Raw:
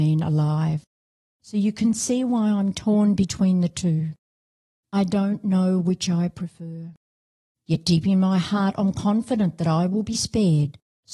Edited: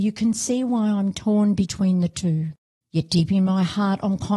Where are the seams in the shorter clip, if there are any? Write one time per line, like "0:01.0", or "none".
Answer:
0:02.8